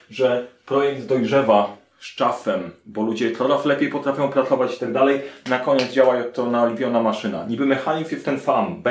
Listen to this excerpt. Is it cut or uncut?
uncut